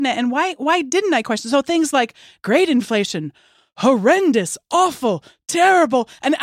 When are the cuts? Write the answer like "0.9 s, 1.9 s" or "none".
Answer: none